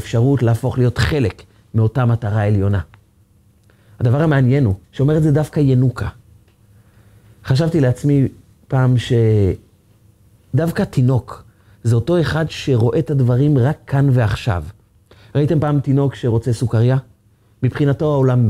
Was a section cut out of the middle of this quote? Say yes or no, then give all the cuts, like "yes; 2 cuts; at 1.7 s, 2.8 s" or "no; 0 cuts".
yes; 1 cut; at 4.8 s